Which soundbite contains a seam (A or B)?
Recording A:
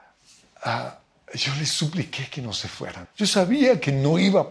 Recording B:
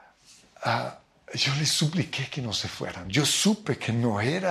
A